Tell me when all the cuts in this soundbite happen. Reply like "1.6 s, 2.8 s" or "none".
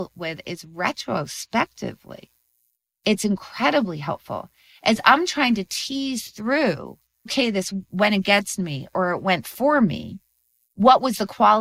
7.3 s